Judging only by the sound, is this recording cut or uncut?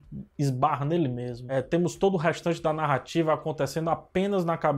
uncut